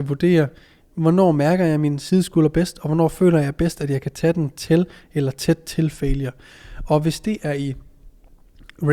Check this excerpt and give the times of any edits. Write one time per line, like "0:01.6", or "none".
none